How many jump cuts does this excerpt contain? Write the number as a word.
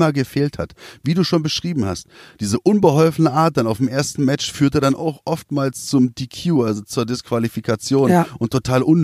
zero